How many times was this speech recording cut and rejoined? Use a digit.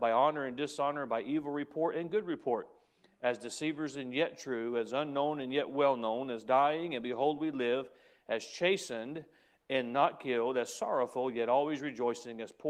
0